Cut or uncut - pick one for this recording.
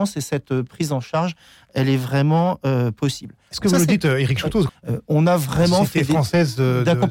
cut